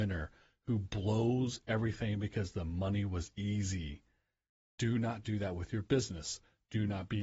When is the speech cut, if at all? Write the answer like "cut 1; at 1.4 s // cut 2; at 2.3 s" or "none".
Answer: none